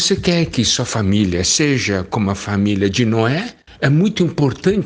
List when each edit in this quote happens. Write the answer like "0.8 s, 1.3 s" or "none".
3.7 s